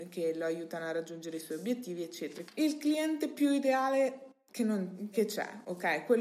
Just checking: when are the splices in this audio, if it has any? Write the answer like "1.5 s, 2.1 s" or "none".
2.5 s, 5.1 s